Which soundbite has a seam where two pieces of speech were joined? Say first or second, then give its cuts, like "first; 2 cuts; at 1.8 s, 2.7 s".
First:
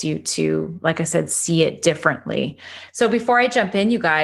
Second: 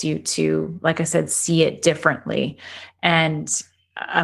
first; 1 cut; at 2.9 s